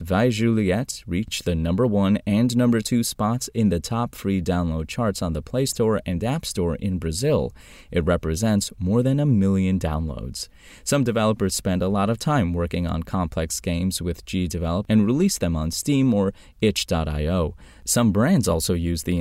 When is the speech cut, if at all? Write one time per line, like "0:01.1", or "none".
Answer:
none